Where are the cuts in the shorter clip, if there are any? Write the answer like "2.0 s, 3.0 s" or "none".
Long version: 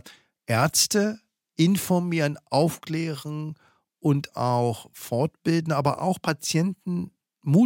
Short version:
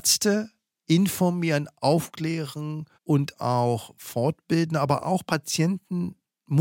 2.9 s